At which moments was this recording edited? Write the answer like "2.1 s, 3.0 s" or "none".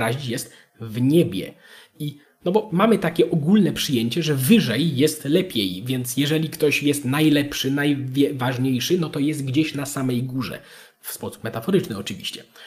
none